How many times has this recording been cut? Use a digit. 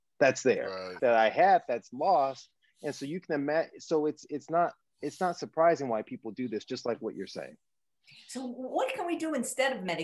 1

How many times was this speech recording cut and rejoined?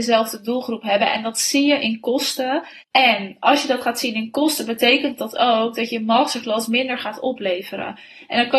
1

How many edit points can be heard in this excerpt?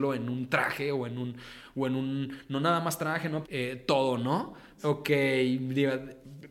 2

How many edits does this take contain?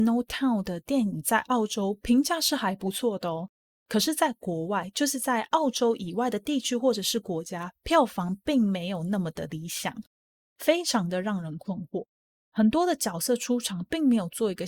1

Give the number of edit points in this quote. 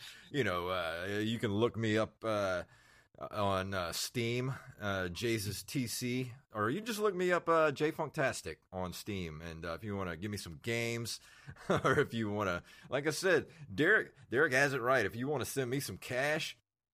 0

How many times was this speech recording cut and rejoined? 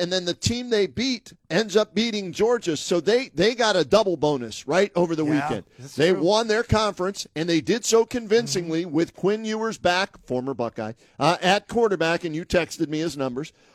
0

